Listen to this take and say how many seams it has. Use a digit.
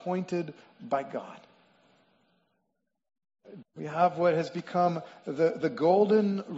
1